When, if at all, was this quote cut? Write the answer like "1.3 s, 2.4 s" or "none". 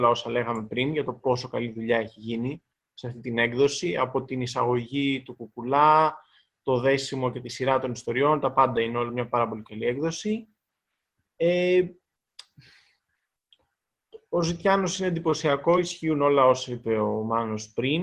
none